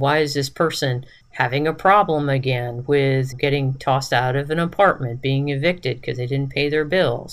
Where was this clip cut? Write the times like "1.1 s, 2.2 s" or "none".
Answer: 1.2 s, 3.3 s